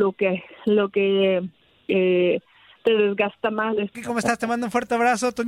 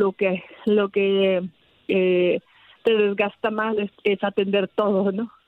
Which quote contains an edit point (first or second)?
first